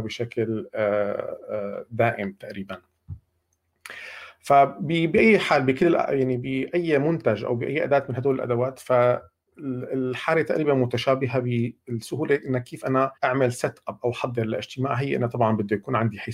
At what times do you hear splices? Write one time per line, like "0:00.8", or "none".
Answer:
0:13.2

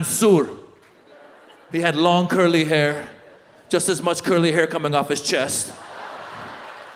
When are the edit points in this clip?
none

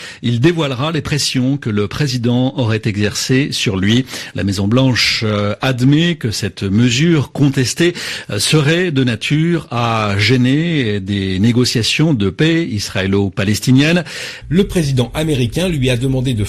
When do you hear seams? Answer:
0:04.3
0:14.4

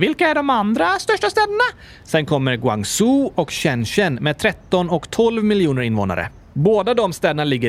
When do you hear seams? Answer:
0:02.0

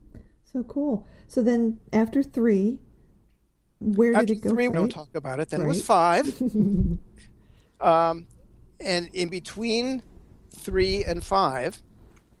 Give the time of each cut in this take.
0:04.7

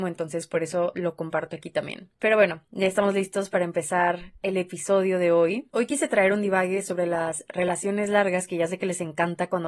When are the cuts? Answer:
none

